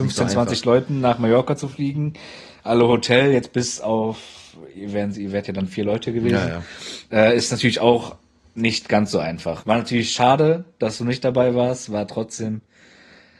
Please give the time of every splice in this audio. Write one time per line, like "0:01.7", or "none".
0:09.6